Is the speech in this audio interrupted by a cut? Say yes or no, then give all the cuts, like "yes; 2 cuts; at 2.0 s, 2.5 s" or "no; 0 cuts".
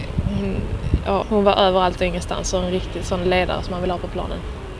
yes; 1 cut; at 1.2 s